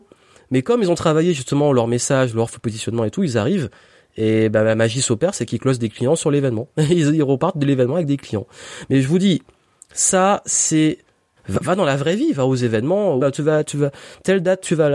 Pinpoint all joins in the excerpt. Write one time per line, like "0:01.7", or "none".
0:08.9
0:11.4
0:13.2